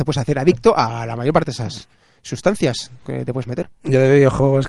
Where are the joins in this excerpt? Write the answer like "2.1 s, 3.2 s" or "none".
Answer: none